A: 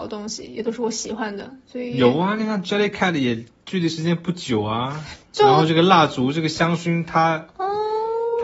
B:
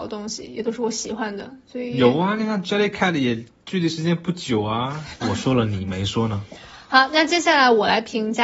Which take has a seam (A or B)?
B